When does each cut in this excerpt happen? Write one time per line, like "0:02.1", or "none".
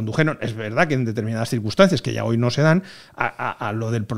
none

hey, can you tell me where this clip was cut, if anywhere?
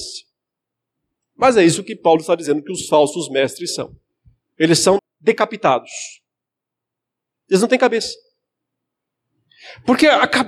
0:05.0

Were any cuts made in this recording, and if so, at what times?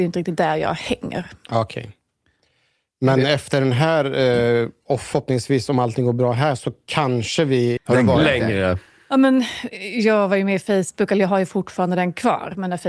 0:07.8

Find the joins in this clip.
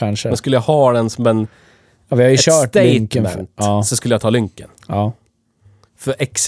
none

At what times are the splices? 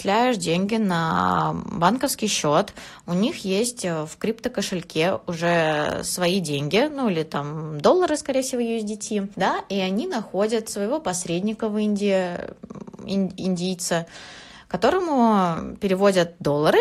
none

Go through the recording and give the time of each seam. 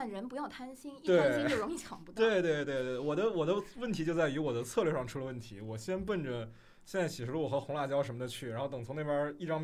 none

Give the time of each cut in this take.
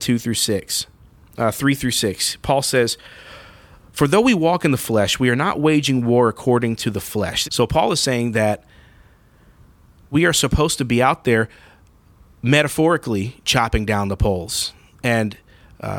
0:07.4
0:10.1

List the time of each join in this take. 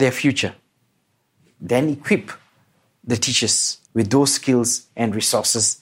0:03.8

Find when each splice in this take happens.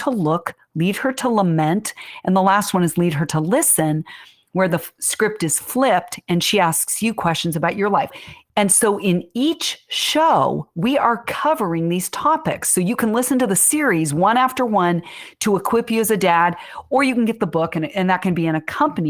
none

